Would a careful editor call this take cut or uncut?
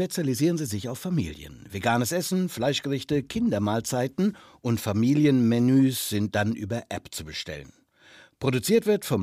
uncut